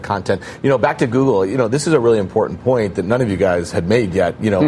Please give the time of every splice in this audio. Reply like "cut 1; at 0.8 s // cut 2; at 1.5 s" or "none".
none

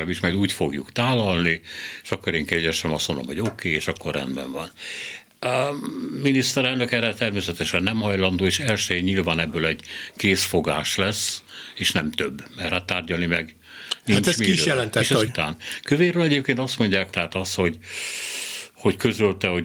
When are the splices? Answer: cut 1; at 15.3 s // cut 2; at 17.1 s

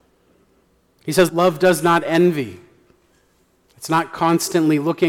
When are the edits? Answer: cut 1; at 1.3 s

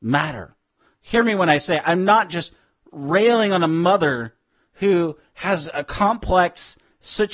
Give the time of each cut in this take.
none

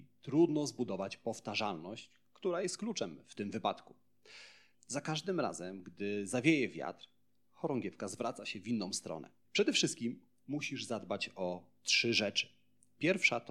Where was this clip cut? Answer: cut 1; at 4.7 s // cut 2; at 9.4 s

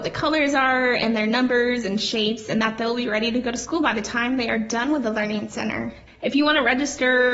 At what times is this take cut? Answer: none

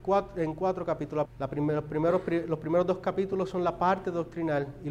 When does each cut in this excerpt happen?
cut 1; at 1.3 s

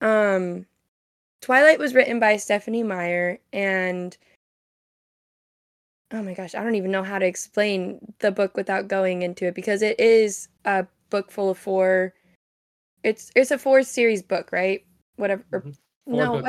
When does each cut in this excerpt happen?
none

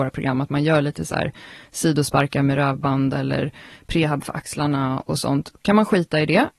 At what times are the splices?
none

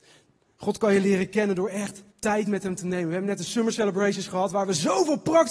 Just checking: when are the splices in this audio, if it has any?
cut 1; at 2.1 s

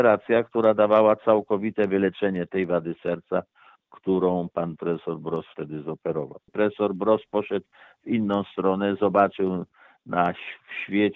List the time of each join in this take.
cut 1; at 6.5 s

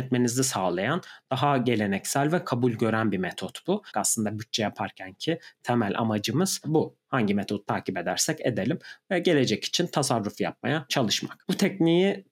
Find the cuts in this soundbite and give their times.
cut 1; at 3.9 s

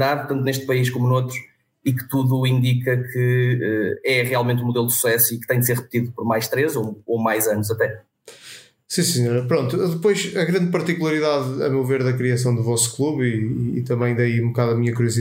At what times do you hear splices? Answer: none

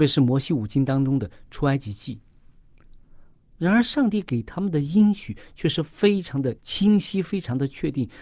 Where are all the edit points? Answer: cut 1; at 3.4 s // cut 2; at 6.6 s

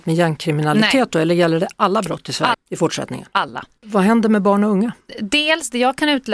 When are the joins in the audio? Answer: cut 1; at 2.5 s

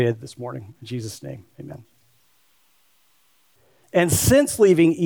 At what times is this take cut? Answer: cut 1; at 3.8 s

